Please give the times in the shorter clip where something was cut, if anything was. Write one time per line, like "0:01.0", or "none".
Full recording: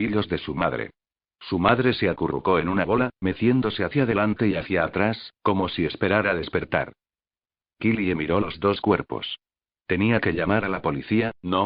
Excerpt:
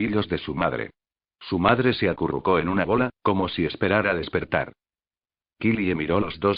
0:03.2